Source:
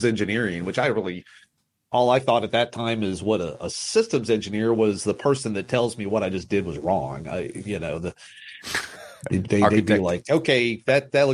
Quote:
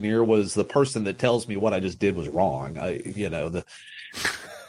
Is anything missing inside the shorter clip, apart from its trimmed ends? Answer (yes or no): no